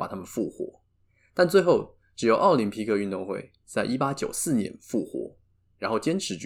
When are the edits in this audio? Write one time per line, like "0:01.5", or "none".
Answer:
none